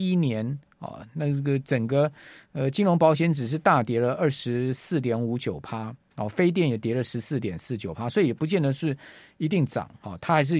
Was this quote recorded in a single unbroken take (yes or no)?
yes